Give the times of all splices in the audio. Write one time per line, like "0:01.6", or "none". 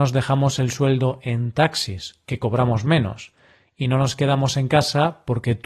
none